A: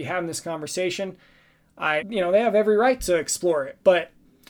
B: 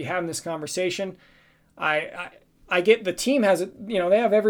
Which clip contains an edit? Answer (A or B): A